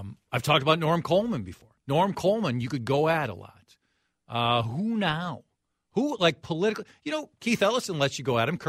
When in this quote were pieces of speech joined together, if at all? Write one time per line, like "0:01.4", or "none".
none